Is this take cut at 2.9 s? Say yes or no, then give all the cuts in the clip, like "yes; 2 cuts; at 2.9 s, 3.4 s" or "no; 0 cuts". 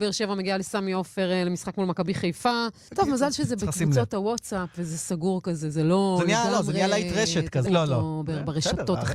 yes; 2 cuts; at 2.9 s, 7.7 s